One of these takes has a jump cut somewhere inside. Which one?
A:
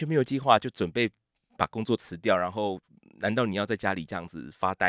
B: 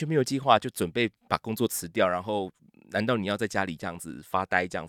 B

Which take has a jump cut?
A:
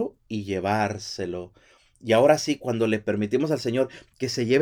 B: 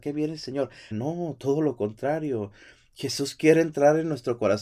B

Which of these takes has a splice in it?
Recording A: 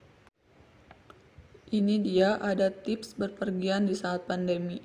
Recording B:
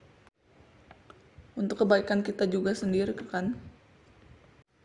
B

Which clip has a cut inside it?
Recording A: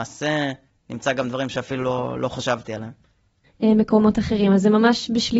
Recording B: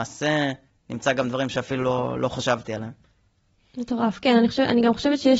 A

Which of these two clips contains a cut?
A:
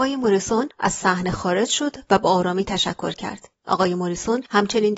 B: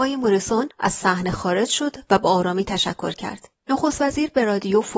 B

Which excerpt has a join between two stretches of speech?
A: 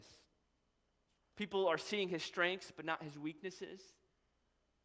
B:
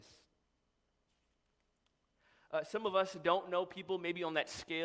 A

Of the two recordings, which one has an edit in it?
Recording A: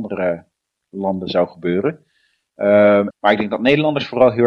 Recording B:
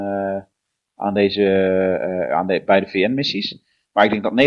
A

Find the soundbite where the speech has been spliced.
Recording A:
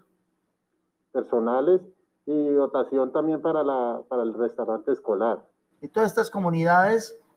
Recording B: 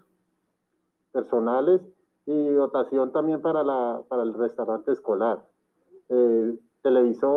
A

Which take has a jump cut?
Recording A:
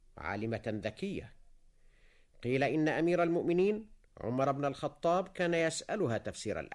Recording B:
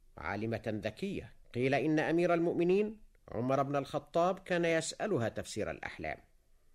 B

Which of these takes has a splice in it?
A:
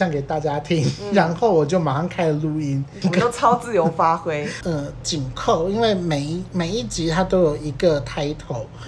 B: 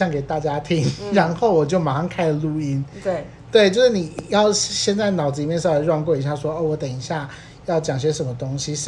A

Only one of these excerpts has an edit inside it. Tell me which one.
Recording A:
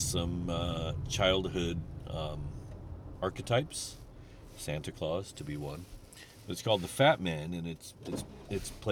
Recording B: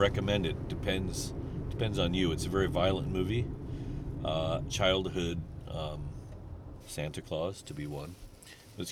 B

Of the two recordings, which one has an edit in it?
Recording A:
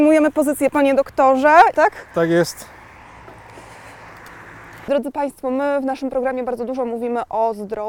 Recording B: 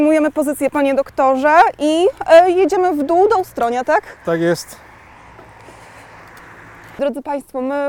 A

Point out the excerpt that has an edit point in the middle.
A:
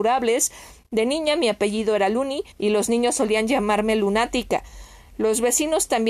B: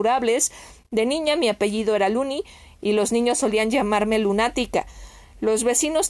A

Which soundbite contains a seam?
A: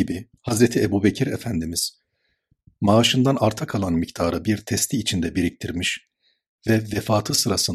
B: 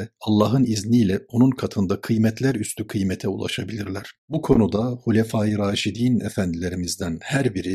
B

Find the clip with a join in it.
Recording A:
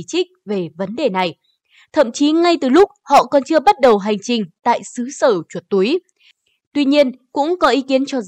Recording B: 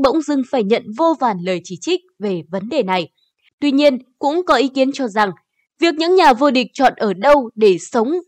B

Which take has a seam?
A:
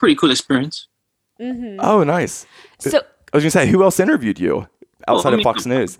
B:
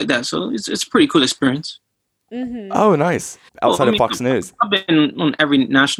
B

